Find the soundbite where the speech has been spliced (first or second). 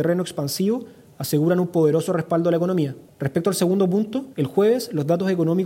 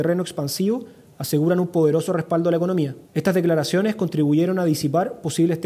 first